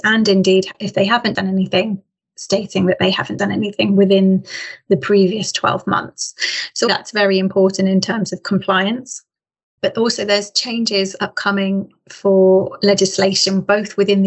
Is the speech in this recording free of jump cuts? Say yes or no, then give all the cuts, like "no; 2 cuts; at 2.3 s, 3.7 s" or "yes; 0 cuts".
no; 1 cut; at 6.9 s